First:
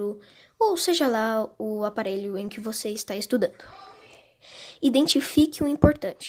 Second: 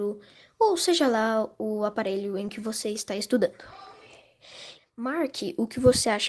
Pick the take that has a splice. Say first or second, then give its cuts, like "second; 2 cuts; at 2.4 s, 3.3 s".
second; 1 cut; at 4.8 s